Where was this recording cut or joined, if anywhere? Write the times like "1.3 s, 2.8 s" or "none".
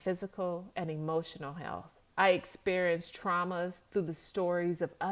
2.1 s